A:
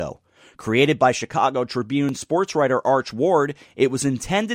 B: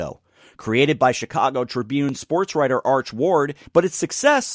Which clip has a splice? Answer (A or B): B